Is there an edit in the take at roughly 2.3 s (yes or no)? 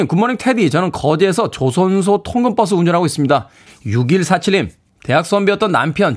no